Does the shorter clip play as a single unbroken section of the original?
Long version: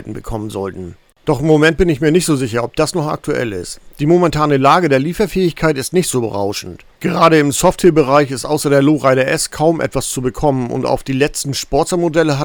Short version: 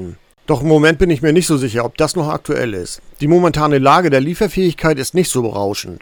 yes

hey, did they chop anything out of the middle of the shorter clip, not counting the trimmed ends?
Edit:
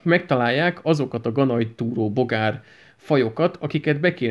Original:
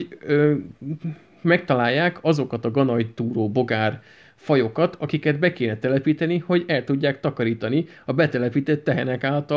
no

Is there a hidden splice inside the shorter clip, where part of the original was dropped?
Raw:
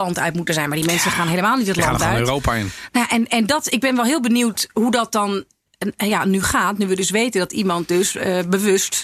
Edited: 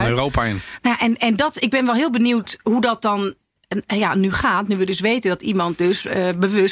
no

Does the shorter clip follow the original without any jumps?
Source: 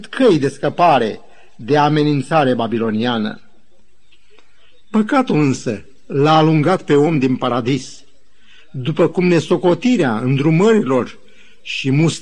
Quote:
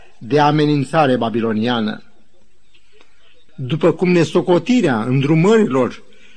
no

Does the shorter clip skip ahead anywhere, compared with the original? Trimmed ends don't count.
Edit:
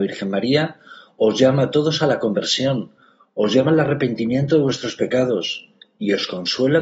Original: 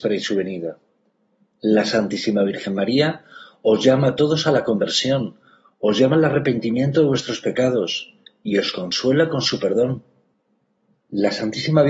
no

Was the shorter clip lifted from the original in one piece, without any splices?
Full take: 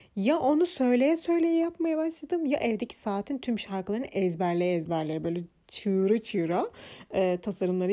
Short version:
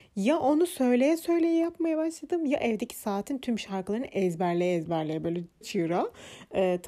no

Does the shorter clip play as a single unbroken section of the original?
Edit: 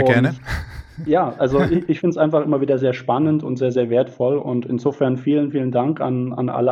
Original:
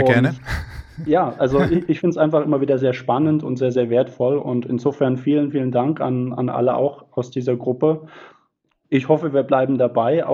yes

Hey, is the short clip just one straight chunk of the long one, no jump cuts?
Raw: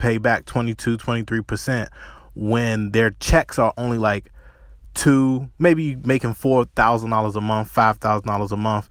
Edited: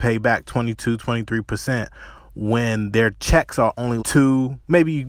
no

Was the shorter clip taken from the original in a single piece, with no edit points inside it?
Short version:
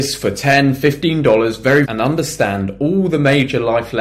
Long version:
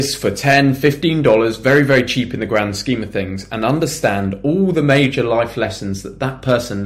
no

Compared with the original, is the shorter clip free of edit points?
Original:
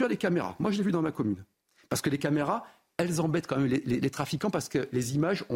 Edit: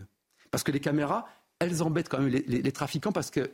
yes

